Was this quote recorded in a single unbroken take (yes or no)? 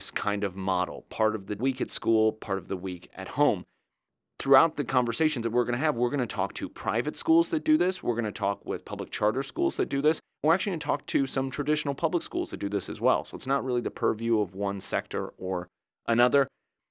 yes